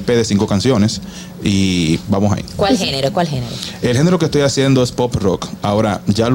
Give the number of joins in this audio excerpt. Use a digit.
0